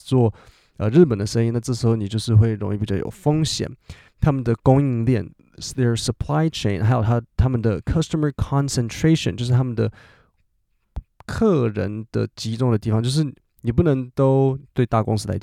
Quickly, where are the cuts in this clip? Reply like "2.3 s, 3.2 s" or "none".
4.1 s